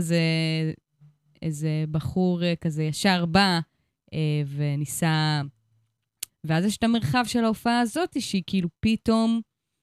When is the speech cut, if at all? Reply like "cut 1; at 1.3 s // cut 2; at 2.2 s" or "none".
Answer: cut 1; at 6.3 s